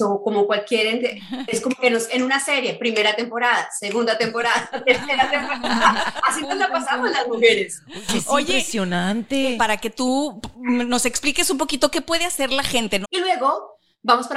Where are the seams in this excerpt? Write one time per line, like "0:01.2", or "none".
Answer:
0:09.6
0:13.0